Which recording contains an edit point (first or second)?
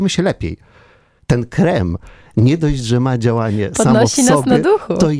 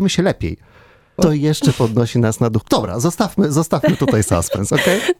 second